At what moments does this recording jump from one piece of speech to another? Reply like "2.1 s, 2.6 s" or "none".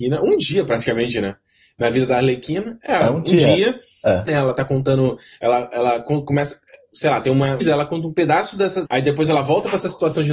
4.3 s, 7.6 s, 8.8 s